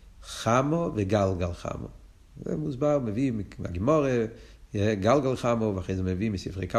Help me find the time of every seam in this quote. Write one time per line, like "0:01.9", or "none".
none

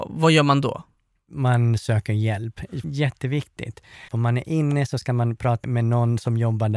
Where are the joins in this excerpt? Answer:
0:02.8
0:04.1
0:05.6

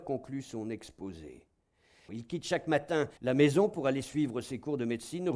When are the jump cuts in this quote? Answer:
0:02.1
0:03.2

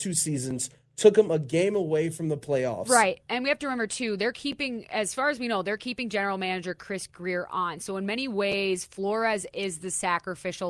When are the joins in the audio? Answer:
none

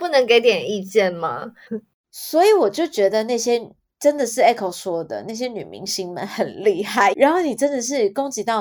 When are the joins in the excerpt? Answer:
0:01.7
0:07.1

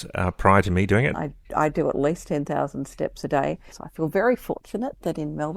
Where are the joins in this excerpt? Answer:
0:01.1
0:03.7

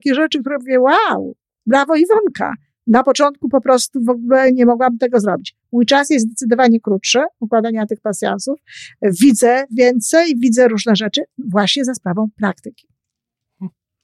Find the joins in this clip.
none

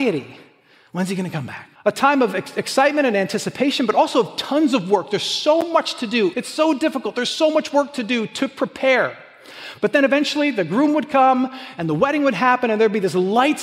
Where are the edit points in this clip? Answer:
0:01.8
0:06.3

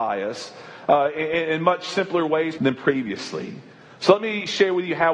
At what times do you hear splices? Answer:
0:02.6

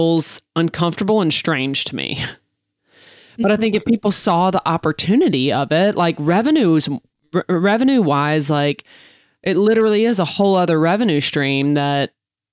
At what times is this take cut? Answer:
none

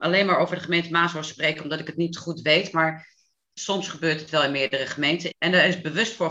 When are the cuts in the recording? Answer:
0:05.3

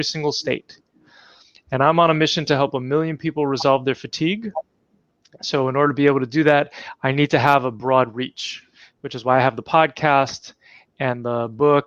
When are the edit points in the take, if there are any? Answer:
none

